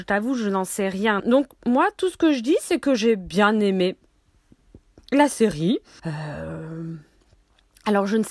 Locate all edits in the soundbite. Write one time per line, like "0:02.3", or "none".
0:01.2
0:06.0